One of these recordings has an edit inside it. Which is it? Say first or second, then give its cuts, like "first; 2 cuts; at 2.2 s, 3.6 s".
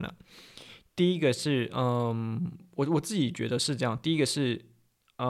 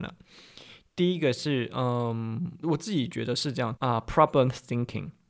second; 2 cuts; at 2.6 s, 3.8 s